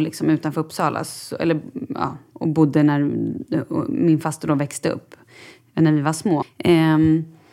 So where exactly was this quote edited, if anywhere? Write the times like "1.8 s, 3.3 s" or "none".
6.4 s